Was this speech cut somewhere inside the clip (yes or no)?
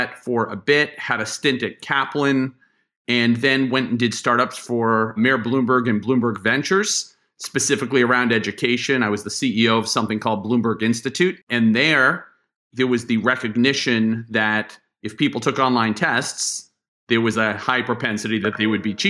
yes